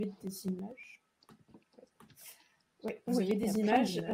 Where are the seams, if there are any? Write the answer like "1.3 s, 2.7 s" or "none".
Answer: none